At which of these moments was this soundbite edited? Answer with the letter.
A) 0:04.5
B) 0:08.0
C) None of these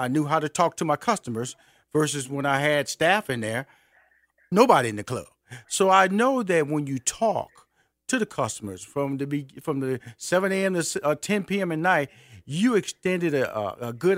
A